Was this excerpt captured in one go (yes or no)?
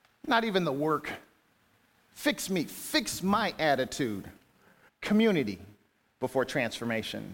no